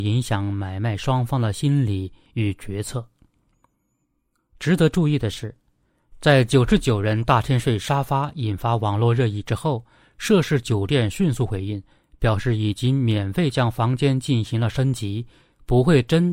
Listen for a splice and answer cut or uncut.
uncut